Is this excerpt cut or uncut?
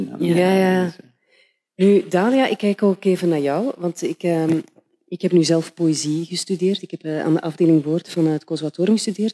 uncut